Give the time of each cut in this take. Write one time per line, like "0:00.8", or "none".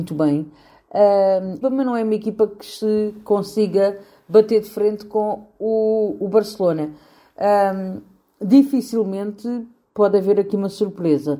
0:01.6